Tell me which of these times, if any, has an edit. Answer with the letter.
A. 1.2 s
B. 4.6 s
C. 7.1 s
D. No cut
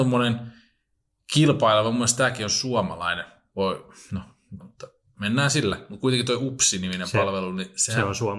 B